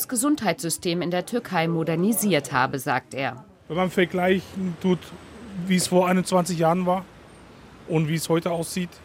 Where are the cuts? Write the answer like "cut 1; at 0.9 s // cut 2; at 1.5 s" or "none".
none